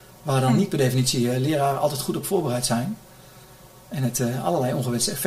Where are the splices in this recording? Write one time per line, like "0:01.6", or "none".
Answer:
none